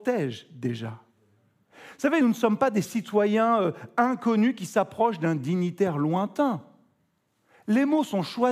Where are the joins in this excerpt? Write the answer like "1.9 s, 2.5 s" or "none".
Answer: none